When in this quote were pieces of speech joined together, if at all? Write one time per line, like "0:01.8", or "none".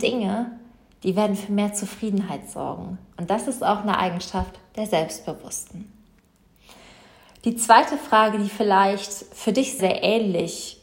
0:09.8